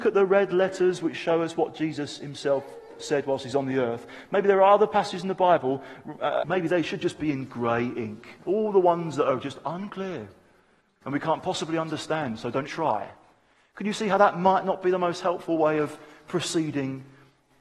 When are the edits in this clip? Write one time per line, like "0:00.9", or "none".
0:06.4
0:12.7